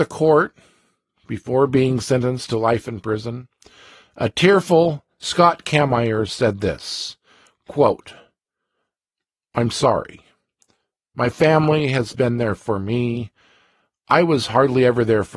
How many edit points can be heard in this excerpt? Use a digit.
1